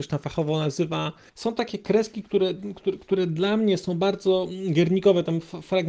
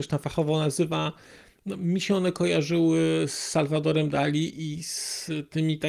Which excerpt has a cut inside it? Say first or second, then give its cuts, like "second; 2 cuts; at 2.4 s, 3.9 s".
first; 1 cut; at 1.3 s